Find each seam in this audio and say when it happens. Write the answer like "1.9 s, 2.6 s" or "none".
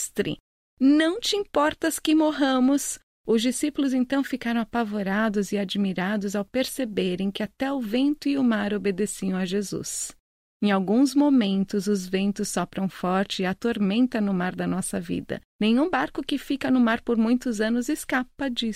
3.2 s, 15.5 s

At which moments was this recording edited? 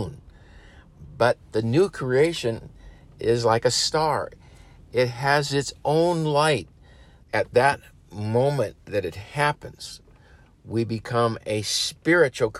7.2 s

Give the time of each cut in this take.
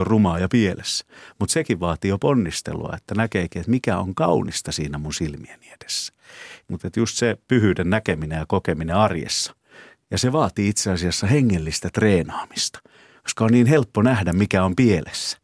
6.6 s

